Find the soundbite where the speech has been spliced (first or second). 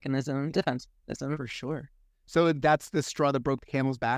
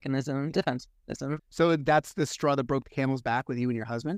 second